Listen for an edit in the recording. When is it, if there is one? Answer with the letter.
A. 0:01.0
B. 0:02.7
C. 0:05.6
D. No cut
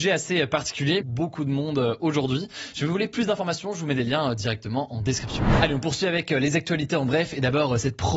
A